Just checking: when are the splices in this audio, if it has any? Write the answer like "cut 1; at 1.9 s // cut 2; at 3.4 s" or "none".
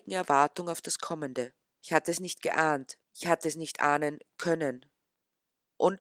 cut 1; at 1.8 s // cut 2; at 3.0 s

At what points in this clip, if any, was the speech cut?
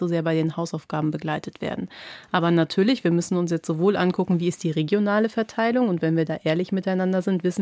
none

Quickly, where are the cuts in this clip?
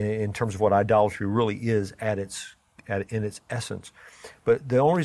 cut 1; at 3.1 s

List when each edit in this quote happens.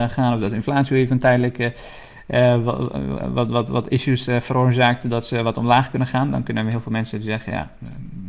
none

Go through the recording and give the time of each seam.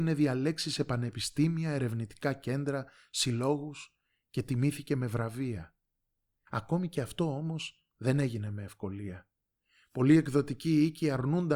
cut 1; at 6.5 s

